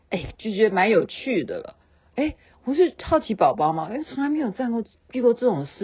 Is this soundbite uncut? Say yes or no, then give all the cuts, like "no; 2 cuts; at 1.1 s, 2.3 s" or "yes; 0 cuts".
yes; 0 cuts